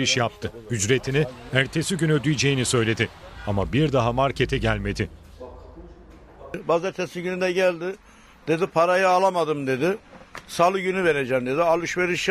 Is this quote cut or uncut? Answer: uncut